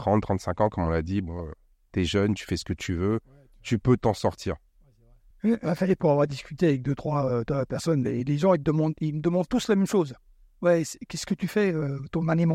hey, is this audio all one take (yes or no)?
no